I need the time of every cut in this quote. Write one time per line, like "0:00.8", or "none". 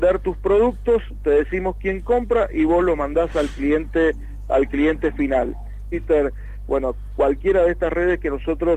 0:05.9

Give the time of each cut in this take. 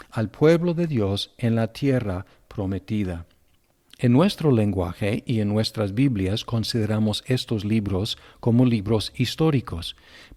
none

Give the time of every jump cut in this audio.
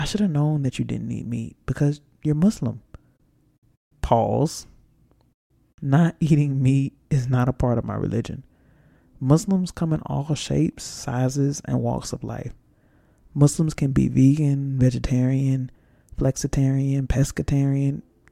none

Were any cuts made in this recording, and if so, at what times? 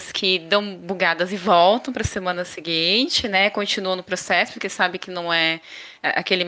none

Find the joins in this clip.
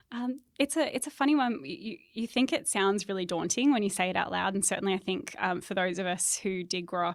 none

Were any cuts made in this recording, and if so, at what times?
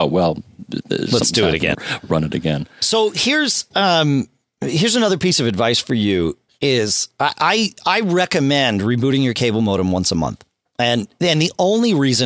0:01.7

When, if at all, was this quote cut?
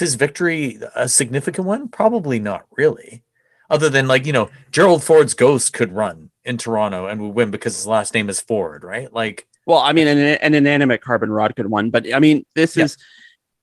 0:09.6

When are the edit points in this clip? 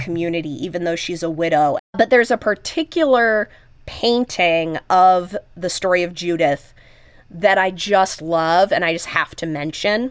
0:01.8

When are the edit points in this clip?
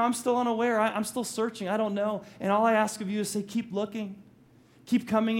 none

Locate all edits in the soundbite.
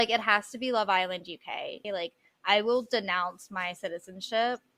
0:01.8

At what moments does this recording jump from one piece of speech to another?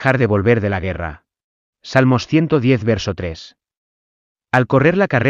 0:01.7

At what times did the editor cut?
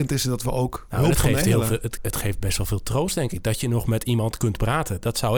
0:02.0

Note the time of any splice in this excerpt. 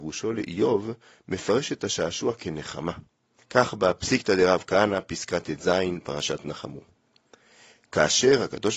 0:03.4

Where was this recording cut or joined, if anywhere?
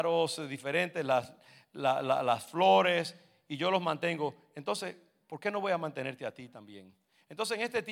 none

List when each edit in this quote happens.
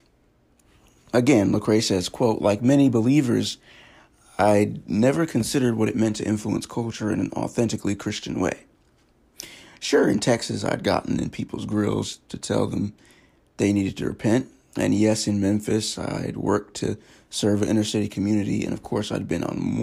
none

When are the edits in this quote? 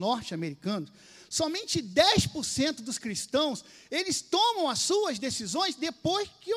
none

